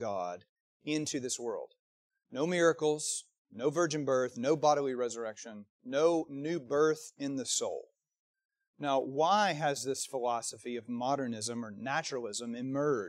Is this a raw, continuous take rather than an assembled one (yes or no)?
yes